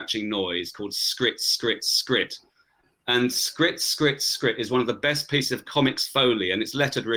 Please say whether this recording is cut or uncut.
uncut